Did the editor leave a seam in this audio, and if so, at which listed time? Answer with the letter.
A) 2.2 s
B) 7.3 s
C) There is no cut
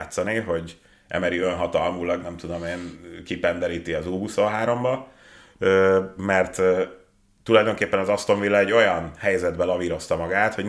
C